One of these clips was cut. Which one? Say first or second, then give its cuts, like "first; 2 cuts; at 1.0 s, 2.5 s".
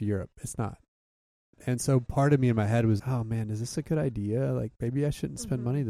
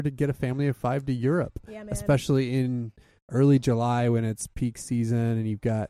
first; 1 cut; at 3.0 s